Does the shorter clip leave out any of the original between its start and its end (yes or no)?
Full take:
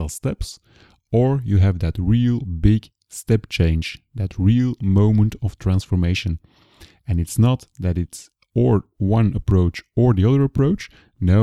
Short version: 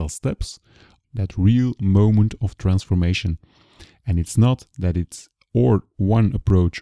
yes